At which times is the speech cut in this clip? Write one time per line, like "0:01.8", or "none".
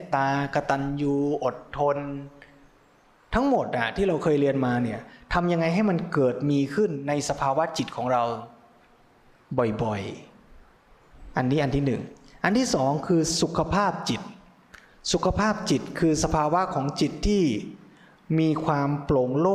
none